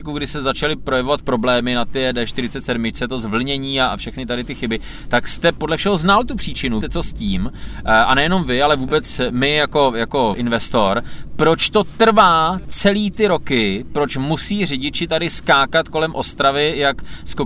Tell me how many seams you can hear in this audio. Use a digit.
2